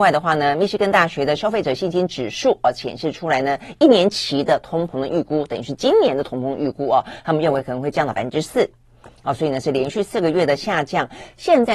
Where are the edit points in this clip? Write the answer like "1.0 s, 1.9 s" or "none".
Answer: none